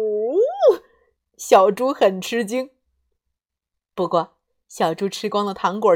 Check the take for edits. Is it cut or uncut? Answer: cut